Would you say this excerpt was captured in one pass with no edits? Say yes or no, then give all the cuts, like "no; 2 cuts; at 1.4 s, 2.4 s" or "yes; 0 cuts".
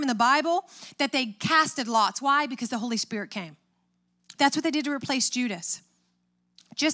no; 1 cut; at 4.4 s